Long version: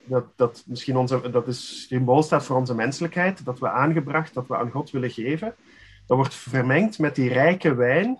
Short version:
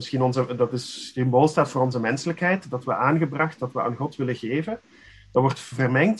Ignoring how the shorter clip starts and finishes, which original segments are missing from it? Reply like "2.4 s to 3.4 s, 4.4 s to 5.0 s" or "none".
none